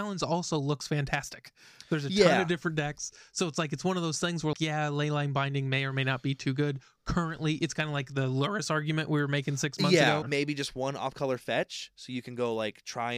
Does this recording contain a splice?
yes; 2 cuts; at 4.5 s, 10.2 s

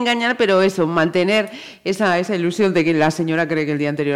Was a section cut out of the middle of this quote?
no; 0 cuts

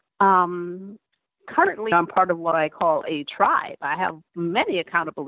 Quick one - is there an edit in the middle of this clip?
yes; 1 cut; at 1.9 s

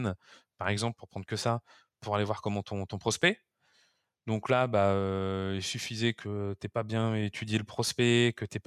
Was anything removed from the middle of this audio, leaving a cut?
no; 0 cuts

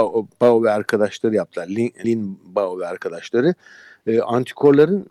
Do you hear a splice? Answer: yes; 1 cut; at 2.0 s

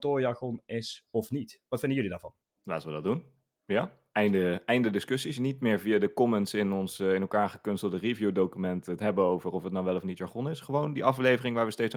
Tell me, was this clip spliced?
no; 0 cuts

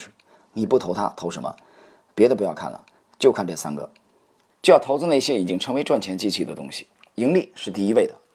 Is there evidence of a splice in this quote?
yes; 1 cut; at 4.5 s

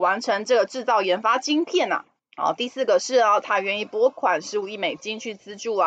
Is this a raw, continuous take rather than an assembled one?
no; 1 cut; at 2.2 s

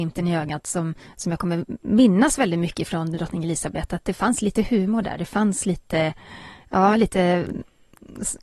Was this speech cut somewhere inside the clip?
no; 0 cuts

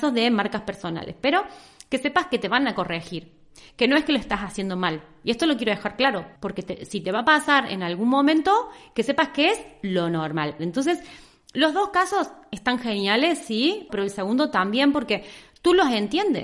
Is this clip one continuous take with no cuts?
no; 3 cuts; at 6.4 s, 10.6 s, 13.9 s

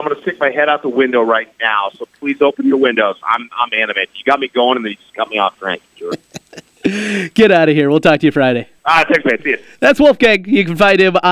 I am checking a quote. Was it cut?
yes; 1 cut; at 8.8 s

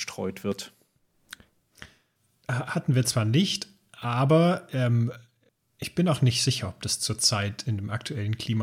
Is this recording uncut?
yes; 0 cuts

